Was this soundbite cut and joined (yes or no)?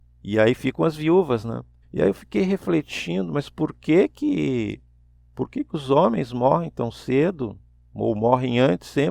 yes